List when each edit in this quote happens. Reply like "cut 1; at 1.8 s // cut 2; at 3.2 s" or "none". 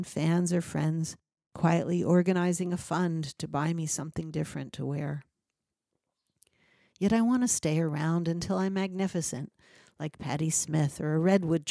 none